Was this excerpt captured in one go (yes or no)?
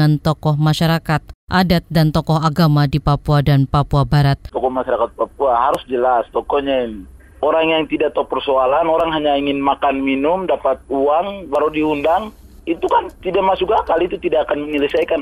no